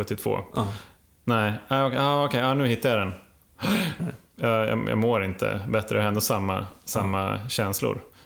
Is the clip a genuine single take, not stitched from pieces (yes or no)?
no